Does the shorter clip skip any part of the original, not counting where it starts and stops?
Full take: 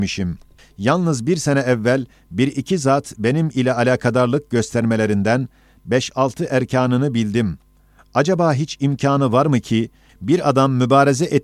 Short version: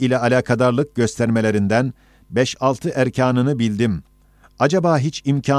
no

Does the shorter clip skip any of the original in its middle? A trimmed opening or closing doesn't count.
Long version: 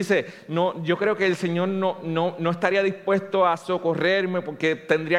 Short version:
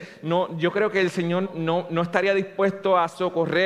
yes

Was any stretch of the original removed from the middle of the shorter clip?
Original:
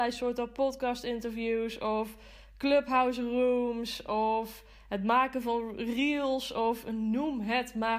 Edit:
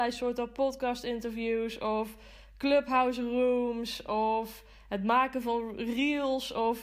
no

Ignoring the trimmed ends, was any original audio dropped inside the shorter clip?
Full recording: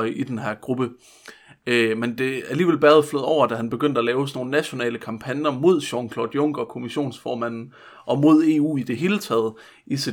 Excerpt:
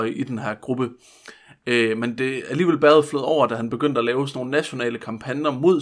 no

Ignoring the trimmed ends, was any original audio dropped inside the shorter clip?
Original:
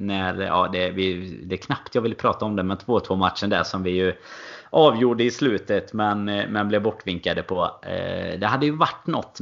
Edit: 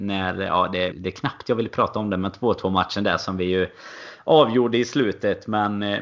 yes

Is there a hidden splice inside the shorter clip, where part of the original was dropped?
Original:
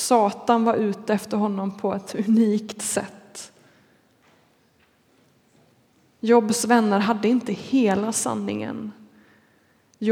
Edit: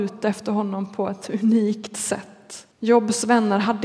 yes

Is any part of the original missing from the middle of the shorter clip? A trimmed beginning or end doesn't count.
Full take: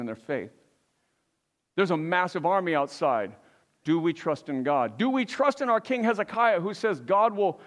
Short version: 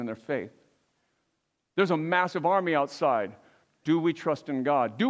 no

